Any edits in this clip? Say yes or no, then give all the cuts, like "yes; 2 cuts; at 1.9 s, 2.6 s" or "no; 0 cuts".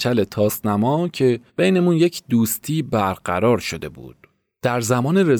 yes; 1 cut; at 1.5 s